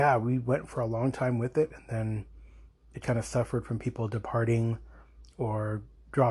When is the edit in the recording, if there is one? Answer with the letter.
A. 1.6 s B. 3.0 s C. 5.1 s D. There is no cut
B